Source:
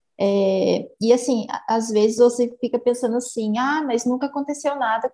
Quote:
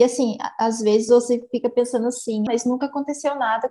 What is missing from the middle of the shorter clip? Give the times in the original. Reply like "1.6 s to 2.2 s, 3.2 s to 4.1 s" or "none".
3.6 s to 3.9 s